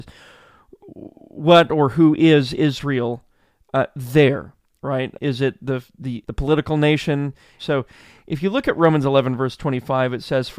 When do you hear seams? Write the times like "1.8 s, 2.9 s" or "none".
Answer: 5.2 s, 6.2 s, 7.6 s